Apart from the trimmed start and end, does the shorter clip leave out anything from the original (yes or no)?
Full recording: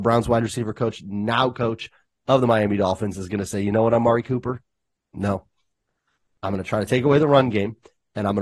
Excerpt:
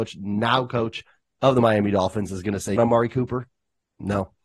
yes